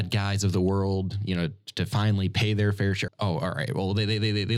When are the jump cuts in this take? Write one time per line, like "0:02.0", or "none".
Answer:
0:03.1